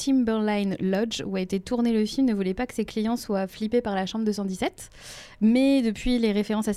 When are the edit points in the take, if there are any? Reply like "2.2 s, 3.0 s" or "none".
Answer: 5.3 s

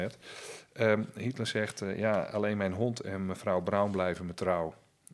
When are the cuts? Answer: none

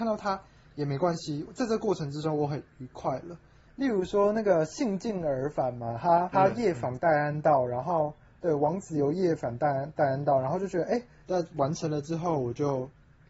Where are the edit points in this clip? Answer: 3.7 s, 6.3 s, 11.2 s

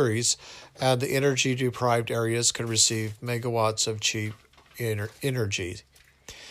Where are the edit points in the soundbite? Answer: none

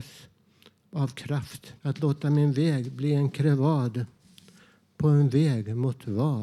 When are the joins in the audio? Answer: 1.8 s

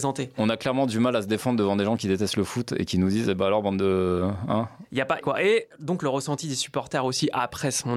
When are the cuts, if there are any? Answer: 5.2 s

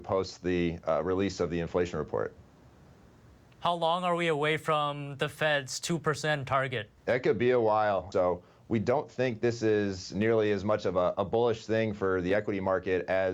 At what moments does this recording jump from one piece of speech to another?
7.0 s, 8.1 s

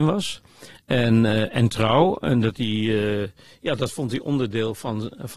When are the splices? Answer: none

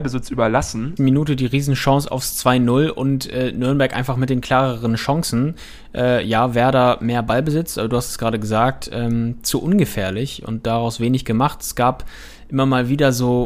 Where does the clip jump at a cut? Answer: 1.0 s

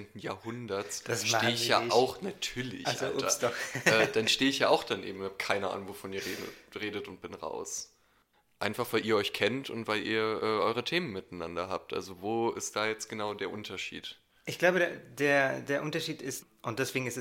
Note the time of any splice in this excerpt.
none

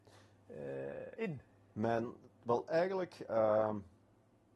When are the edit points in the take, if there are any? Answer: none

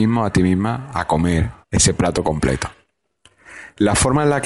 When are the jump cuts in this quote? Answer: 1.6 s

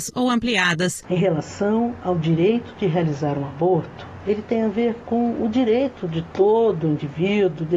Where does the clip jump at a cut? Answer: 1.0 s

